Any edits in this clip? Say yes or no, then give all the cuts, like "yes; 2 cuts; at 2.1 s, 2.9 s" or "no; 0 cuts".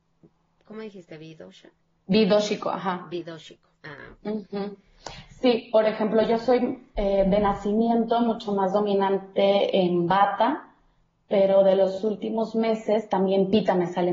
no; 0 cuts